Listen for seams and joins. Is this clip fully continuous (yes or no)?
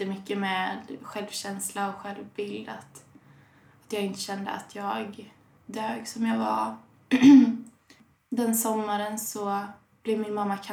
yes